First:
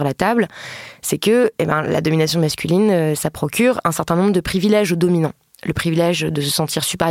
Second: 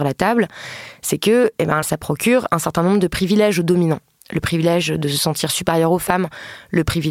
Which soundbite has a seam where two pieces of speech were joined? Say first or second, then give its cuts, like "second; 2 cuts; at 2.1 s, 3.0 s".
second; 1 cut; at 1.8 s